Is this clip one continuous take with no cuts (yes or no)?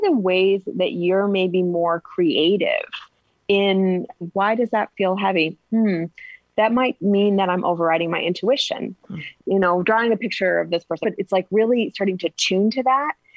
no